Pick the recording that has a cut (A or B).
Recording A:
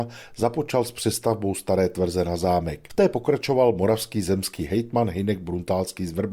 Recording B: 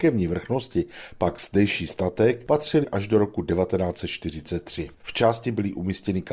B